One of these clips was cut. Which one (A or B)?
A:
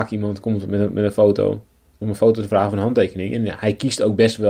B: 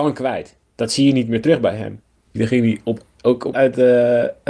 B